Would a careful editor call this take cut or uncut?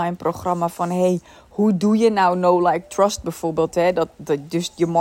uncut